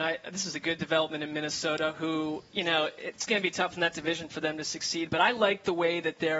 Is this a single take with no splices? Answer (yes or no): yes